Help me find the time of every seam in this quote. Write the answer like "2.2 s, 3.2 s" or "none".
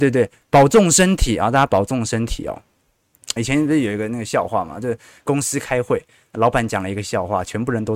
3.4 s